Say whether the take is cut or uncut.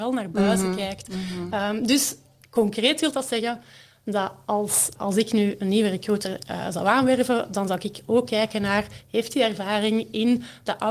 cut